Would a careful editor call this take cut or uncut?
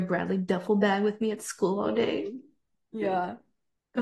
uncut